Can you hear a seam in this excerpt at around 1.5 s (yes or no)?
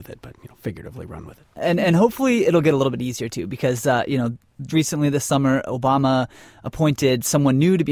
no